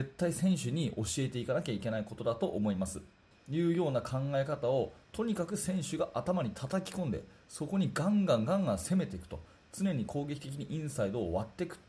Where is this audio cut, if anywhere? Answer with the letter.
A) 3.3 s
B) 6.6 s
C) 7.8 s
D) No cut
A